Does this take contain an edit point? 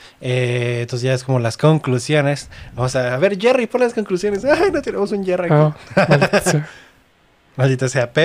no; 0 cuts

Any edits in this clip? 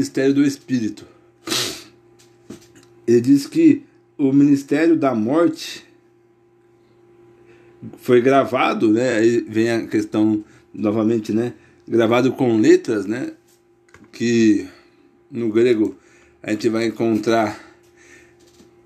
no; 0 cuts

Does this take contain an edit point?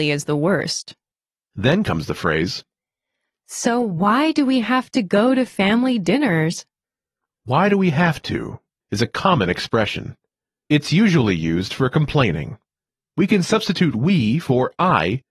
no; 0 cuts

